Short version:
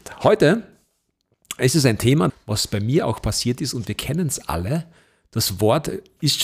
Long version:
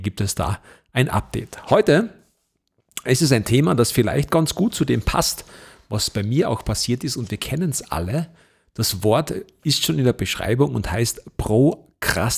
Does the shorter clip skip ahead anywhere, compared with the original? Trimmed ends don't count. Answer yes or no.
yes